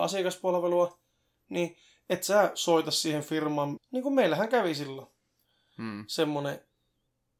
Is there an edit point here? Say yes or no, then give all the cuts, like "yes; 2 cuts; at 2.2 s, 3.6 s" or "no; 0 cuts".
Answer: yes; 1 cut; at 3.8 s